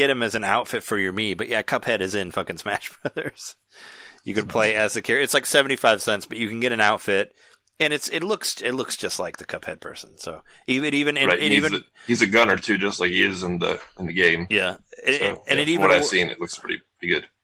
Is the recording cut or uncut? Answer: uncut